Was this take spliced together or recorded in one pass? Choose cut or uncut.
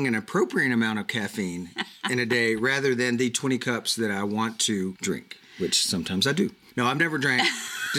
uncut